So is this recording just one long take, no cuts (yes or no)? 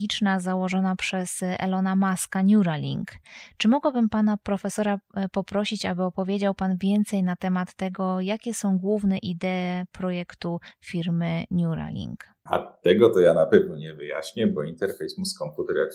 yes